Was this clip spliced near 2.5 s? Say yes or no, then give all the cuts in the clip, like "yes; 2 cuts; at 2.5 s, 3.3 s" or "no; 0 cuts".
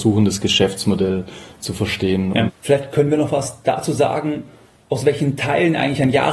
yes; 1 cut; at 2.5 s